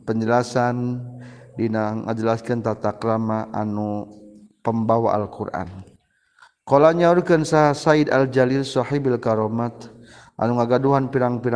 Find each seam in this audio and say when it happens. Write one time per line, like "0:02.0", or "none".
none